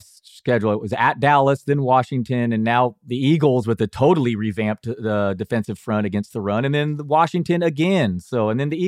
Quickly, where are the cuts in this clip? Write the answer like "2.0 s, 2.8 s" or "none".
none